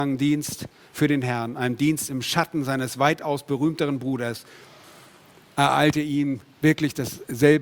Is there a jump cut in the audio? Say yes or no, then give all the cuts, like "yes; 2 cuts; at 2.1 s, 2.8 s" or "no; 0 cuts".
no; 0 cuts